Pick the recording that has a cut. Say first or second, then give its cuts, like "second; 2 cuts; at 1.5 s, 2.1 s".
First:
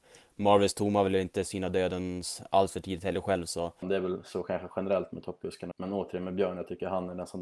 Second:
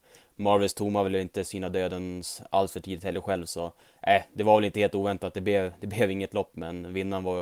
first; 2 cuts; at 3.8 s, 5.7 s